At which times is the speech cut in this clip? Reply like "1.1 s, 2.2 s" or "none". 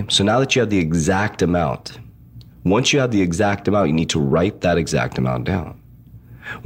none